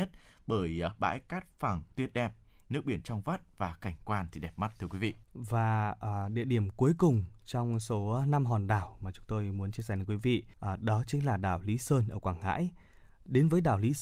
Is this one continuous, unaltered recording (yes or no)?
no